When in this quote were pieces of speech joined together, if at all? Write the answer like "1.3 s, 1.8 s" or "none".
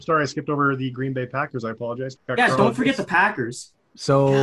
2.1 s